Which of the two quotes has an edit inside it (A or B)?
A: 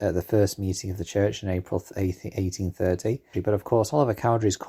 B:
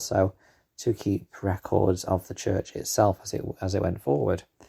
A